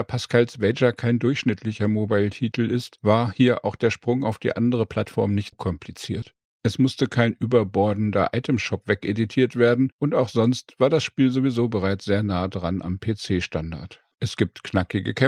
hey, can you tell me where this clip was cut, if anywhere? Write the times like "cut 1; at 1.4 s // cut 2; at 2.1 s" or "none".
cut 1; at 5.5 s // cut 2; at 14.1 s